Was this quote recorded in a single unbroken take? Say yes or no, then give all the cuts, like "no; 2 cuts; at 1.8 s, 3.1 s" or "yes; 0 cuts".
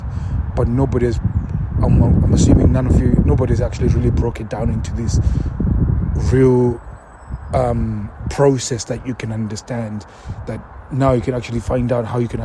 yes; 0 cuts